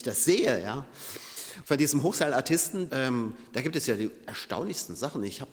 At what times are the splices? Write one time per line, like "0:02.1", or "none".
0:01.6
0:02.9